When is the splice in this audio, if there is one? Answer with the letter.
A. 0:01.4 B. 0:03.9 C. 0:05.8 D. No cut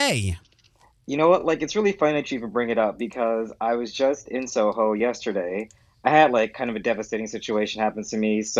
D